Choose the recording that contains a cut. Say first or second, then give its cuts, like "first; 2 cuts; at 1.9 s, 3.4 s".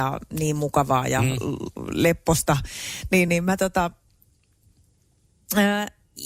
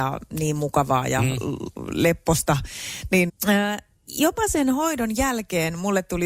second; 1 cut; at 3.3 s